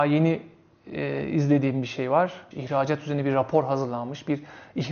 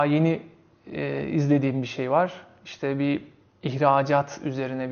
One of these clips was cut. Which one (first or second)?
first